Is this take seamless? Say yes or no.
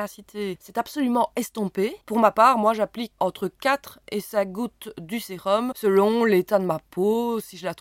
no